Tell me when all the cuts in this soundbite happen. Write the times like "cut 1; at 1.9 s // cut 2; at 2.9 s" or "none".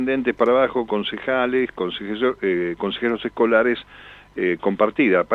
none